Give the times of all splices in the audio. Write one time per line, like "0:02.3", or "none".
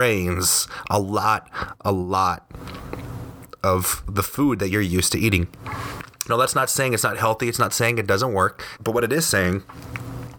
0:08.8